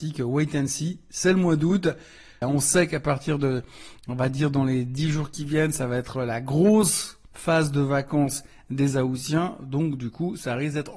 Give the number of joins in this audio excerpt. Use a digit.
1